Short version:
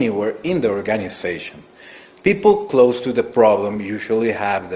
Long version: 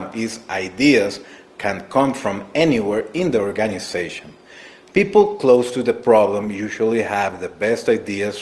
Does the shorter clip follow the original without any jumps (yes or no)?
yes